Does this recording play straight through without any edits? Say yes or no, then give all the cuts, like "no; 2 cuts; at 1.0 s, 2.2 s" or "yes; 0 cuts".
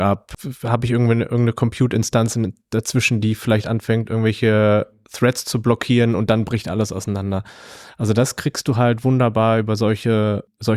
yes; 0 cuts